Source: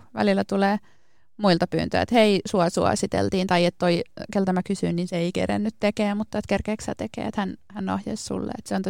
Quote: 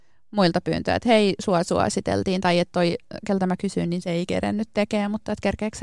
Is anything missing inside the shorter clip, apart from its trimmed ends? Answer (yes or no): no